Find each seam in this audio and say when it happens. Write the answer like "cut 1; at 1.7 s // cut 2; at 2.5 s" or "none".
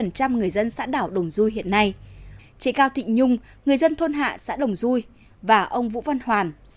cut 1; at 2.4 s